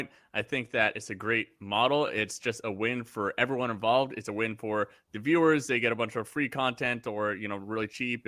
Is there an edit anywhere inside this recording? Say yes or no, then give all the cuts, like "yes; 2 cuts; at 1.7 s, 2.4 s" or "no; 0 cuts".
no; 0 cuts